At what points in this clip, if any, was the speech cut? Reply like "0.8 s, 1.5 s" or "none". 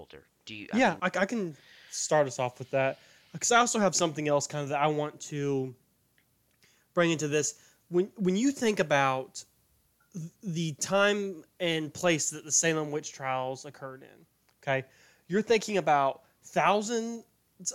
1.0 s